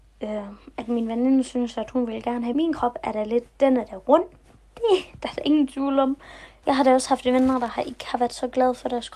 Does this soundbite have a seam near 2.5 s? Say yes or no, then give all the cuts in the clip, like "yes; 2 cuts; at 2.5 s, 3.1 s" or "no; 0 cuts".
yes; 2 cuts; at 2.5 s, 6.6 s